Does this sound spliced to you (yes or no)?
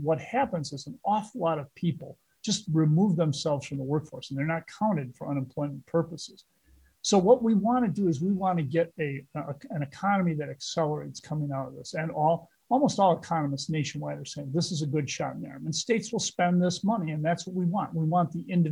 no